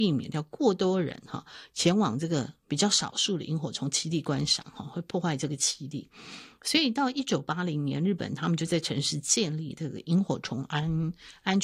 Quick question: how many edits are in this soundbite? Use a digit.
0